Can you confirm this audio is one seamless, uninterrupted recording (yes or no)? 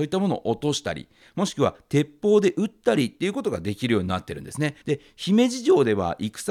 no